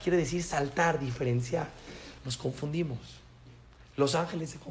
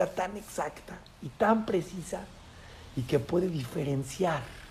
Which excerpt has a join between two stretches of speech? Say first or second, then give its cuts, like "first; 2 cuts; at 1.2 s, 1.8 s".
first; 1 cut; at 2.2 s